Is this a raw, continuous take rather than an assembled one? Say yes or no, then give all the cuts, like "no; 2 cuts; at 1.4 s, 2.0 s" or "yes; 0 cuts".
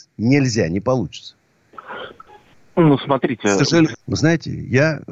no; 1 cut; at 4.0 s